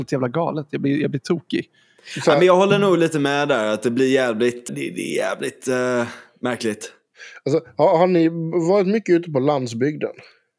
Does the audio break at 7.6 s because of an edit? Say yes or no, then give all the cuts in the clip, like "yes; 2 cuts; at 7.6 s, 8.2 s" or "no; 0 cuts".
no; 1 cut; at 4.7 s